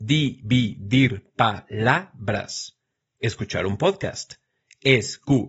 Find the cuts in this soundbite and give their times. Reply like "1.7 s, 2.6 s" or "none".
none